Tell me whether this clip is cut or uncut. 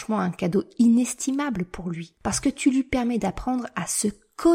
uncut